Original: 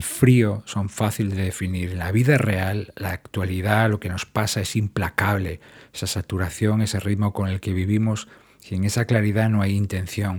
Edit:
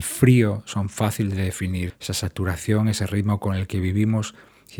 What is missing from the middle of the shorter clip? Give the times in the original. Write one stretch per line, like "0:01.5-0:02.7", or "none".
0:01.9-0:05.8